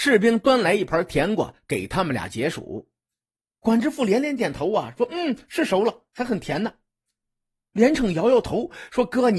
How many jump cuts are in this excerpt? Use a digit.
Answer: 1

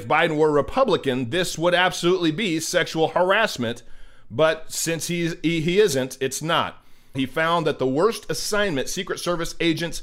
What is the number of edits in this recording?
1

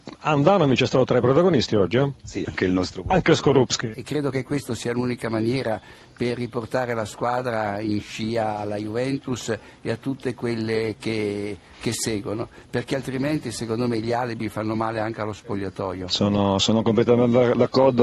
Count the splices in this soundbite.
2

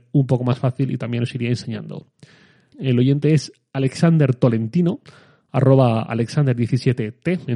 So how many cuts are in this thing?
1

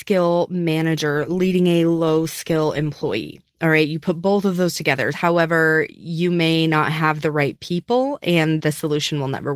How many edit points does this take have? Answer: 2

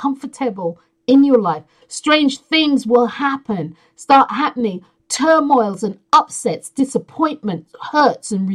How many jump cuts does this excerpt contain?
1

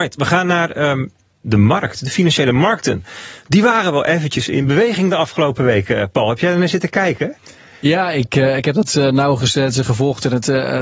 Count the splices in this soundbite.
1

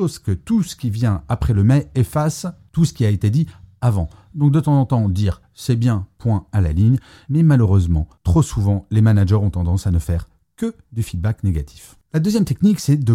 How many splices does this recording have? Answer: 1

